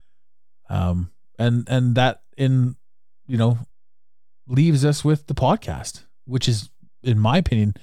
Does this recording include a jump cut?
no; 0 cuts

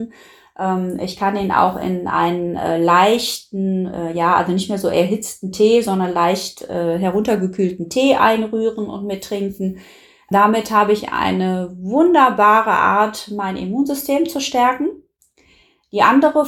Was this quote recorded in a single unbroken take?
yes; 0 cuts

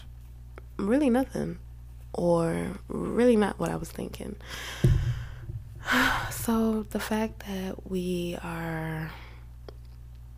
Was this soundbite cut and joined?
no; 0 cuts

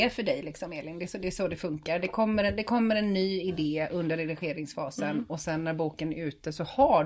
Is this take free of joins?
yes; 0 cuts

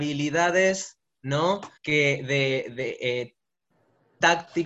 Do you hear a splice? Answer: yes; 1 cut; at 1.8 s

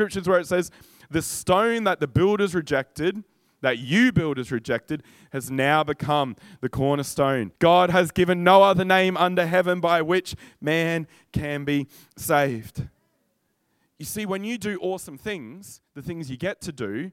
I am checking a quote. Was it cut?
yes; 1 cut; at 7.6 s

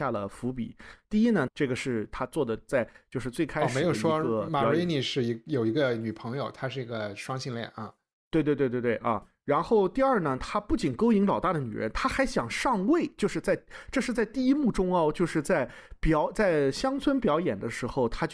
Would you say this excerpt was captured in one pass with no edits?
no; 1 cut; at 1.5 s

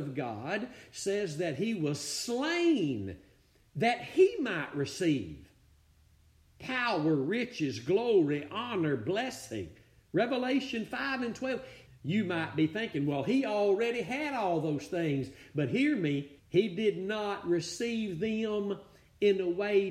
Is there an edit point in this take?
yes; 2 cuts; at 11.9 s, 16.4 s

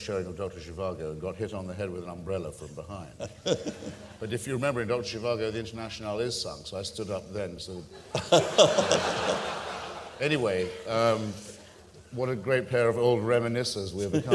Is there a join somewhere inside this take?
no; 0 cuts

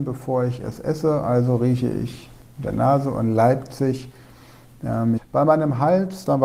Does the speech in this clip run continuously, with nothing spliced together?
no; 1 cut; at 5.2 s

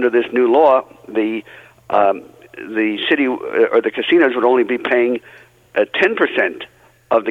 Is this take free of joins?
yes; 0 cuts

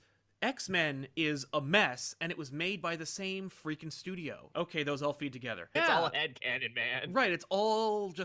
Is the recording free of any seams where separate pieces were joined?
no; 2 cuts; at 4.5 s, 5.8 s

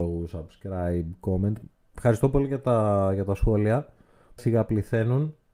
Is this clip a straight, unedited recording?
no; 1 cut; at 4.4 s

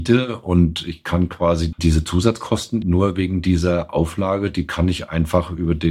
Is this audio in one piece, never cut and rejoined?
no; 2 cuts; at 1.7 s, 2.8 s

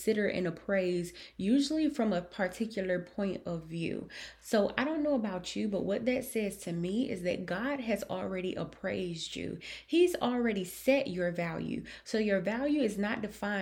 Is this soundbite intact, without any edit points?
yes; 0 cuts

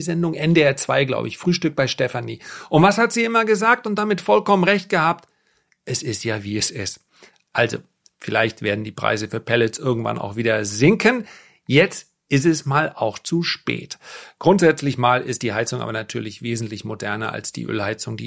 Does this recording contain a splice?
no; 0 cuts

